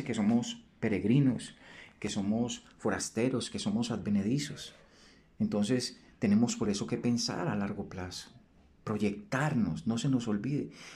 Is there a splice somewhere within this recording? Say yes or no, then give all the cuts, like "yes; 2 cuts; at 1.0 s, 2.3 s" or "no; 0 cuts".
no; 0 cuts